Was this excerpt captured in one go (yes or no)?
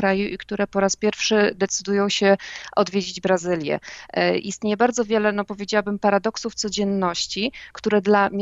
yes